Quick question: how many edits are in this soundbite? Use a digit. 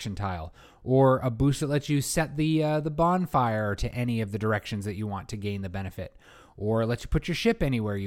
0